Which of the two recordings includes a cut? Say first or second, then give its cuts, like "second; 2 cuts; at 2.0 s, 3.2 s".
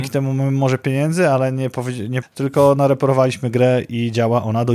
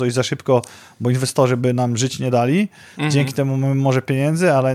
first; 1 cut; at 2.2 s